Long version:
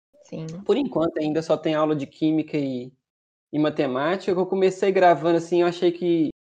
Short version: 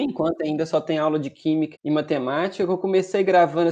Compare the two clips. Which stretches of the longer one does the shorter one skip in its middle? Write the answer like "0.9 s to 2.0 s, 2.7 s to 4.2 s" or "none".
2.5 s to 3.4 s